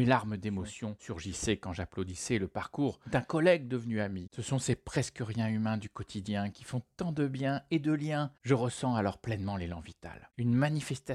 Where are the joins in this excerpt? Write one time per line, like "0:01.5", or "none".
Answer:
none